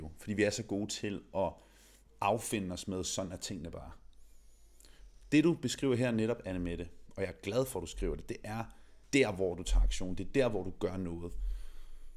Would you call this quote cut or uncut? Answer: cut